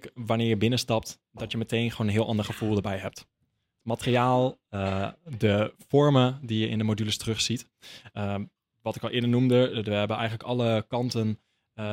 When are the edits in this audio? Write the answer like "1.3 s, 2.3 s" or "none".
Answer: none